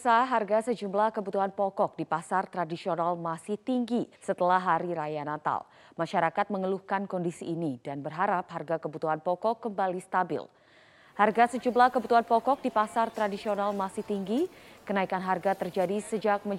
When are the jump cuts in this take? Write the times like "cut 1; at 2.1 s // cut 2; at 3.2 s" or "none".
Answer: cut 1; at 4.1 s